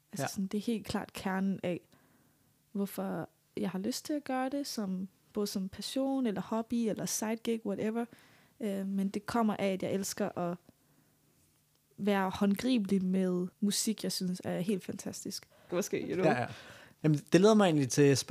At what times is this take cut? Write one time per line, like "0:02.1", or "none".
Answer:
0:13.5
0:15.7
0:17.0